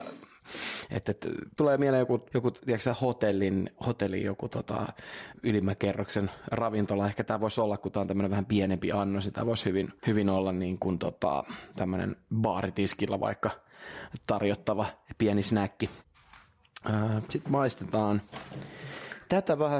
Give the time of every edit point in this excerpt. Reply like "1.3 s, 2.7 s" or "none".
none